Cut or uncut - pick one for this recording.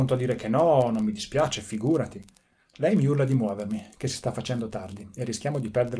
uncut